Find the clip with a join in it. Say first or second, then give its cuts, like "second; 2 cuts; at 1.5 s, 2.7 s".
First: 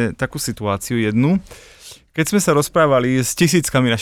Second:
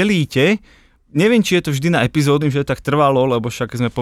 second; 1 cut; at 2.4 s